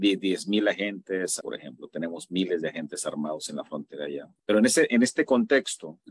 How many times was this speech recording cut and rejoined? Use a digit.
2